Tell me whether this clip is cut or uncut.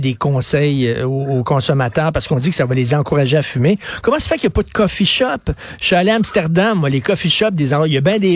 uncut